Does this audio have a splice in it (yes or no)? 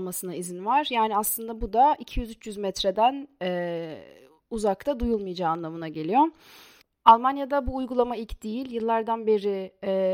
no